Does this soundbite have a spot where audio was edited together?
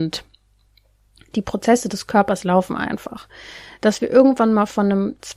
no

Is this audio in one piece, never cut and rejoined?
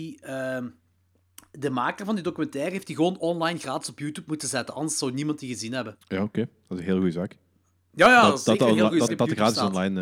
no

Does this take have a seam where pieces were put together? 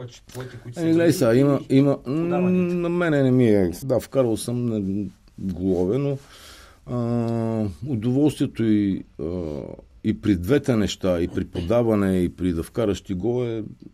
yes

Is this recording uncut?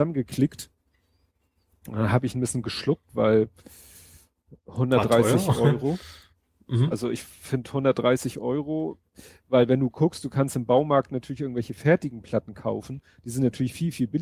yes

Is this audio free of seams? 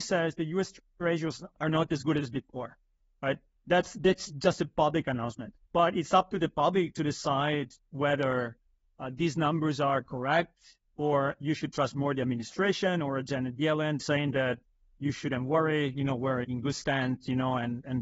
no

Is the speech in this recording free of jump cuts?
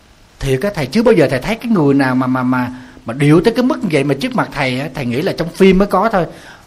yes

